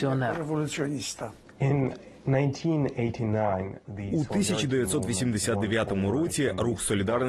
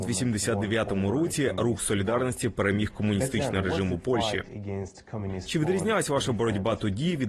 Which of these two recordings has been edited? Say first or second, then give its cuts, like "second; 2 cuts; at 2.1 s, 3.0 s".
first; 1 cut; at 2.2 s